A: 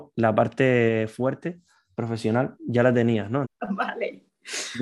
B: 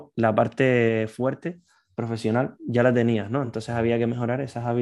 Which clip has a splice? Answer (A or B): A